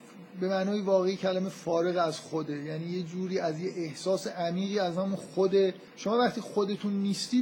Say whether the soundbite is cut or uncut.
cut